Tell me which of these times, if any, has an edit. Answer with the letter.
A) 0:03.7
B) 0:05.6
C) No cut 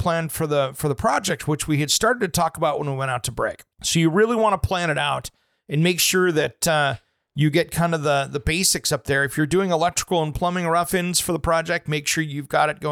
A